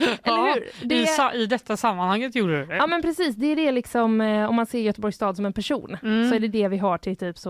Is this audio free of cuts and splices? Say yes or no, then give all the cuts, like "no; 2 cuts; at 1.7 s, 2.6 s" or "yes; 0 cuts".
yes; 0 cuts